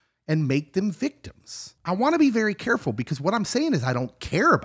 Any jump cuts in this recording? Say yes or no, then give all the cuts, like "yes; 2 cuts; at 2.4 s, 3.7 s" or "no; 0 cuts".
yes; 1 cut; at 1.8 s